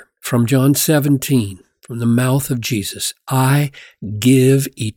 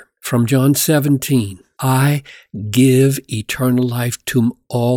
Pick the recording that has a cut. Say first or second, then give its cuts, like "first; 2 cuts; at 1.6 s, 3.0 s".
second; 1 cut; at 1.8 s